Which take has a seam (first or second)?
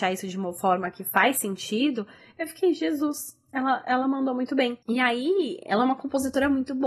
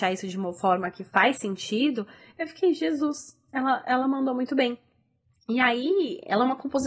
first